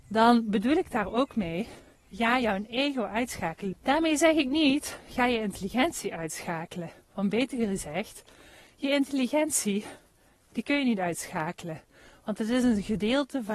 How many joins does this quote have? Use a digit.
1